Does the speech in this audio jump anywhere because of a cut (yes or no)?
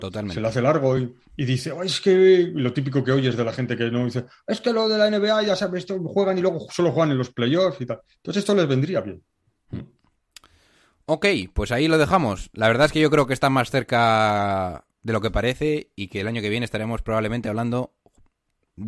no